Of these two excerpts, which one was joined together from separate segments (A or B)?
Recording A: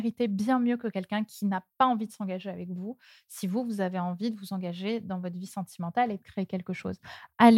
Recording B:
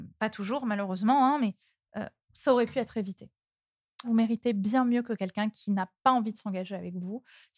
B